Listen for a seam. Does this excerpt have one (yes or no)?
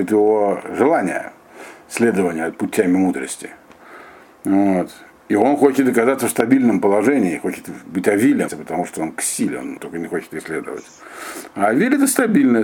yes